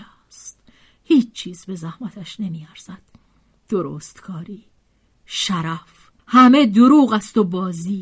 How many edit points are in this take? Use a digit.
1